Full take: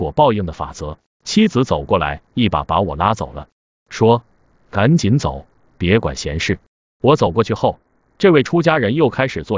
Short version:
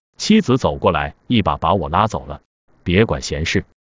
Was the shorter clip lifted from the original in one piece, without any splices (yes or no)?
no